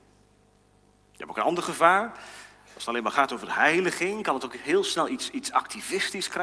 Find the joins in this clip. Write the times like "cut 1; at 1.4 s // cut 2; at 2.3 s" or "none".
cut 1; at 1.0 s